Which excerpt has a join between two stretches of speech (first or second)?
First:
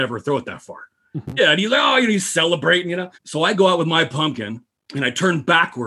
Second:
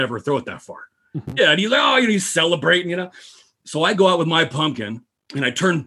first